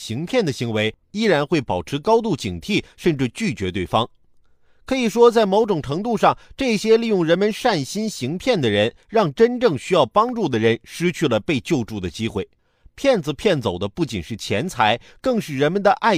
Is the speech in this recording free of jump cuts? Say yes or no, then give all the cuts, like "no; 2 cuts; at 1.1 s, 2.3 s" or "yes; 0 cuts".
no; 1 cut; at 1.0 s